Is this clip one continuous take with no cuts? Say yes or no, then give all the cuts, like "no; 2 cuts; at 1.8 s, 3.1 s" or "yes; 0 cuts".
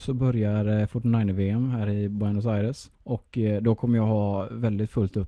no; 1 cut; at 2.9 s